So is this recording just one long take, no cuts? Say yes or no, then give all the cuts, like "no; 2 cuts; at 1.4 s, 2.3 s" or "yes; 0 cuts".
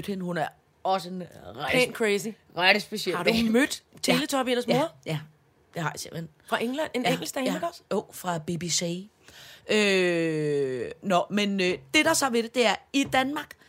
yes; 0 cuts